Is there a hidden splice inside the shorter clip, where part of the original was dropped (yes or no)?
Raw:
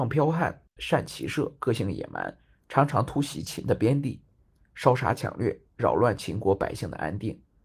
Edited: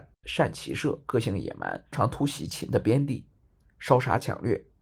yes